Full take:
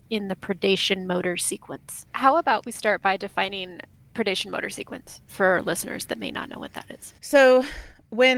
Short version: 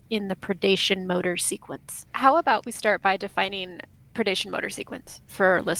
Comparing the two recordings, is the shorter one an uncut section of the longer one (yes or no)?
yes